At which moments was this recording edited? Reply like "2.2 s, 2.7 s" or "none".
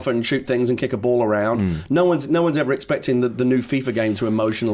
none